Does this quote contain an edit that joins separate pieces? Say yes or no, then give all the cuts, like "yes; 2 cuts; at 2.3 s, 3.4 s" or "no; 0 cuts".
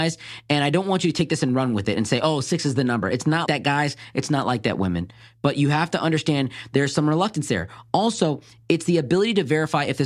yes; 1 cut; at 3.5 s